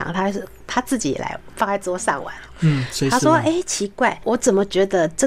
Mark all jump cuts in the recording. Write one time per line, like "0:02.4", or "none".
none